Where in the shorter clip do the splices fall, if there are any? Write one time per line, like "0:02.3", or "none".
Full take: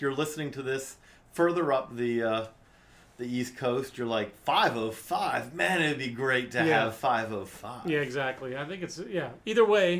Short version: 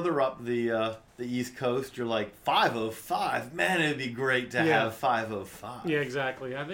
0:01.1